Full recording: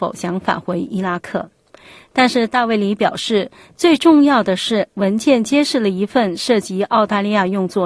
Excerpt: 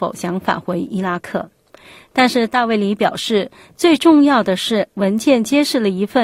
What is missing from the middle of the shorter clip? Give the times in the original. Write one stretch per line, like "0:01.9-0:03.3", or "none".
none